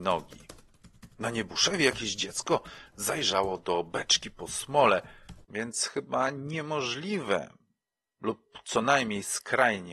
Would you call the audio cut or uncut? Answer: cut